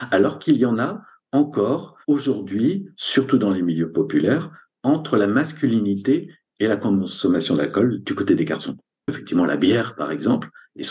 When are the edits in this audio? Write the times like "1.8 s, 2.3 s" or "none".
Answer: 2.0 s